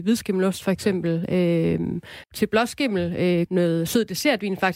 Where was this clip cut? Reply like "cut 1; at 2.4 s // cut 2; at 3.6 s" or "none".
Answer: cut 1; at 2.2 s // cut 2; at 3.5 s